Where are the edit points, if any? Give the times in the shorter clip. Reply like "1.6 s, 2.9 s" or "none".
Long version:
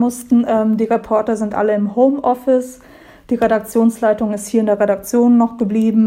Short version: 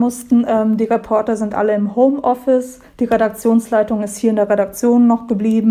2.9 s